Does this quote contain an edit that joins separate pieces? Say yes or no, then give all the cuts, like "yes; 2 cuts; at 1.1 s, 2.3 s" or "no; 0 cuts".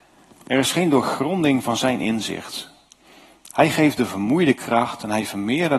no; 0 cuts